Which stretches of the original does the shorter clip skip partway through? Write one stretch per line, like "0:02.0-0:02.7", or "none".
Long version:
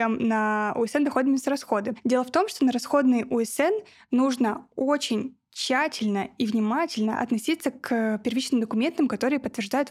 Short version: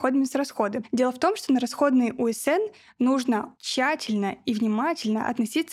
0:04.7-0:05.5